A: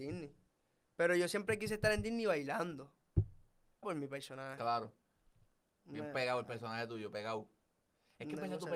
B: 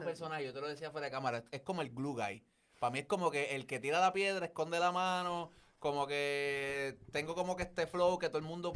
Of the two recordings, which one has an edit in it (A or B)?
A